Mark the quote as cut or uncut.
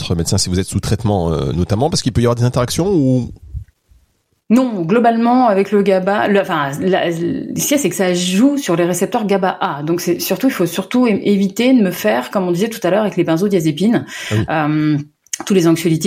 uncut